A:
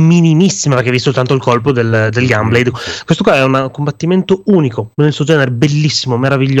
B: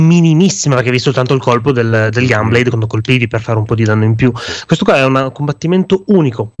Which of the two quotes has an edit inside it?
A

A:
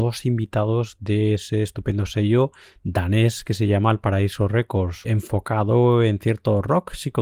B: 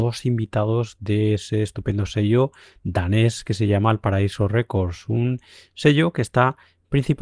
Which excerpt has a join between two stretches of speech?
A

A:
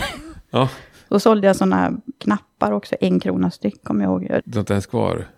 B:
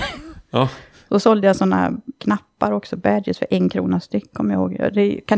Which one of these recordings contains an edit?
A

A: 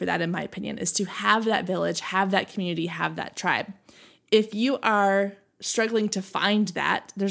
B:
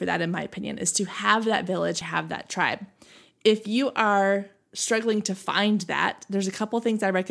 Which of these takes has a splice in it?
B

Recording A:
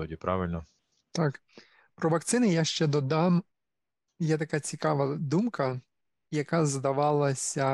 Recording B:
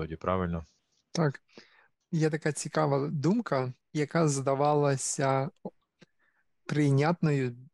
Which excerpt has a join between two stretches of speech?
B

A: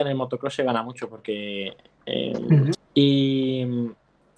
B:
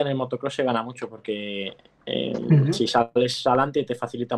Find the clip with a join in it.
A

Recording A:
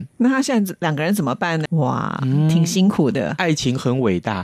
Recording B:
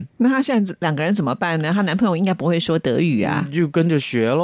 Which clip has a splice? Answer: A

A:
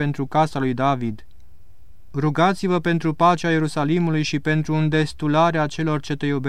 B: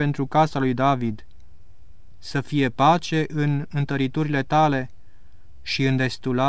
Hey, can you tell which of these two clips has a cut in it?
B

